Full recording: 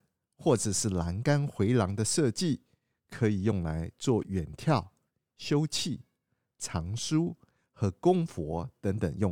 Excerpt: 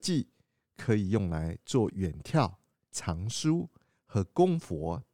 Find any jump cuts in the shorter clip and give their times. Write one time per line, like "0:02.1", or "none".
0:02.9